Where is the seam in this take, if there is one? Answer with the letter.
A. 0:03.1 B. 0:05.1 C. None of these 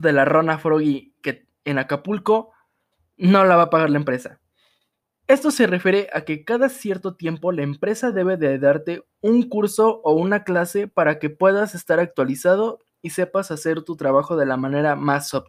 B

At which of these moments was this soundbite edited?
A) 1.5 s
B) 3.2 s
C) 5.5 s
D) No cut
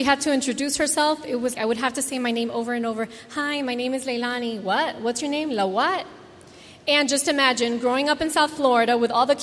A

